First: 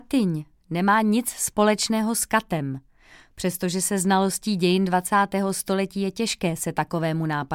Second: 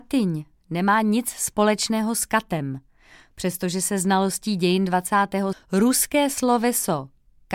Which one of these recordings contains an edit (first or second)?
second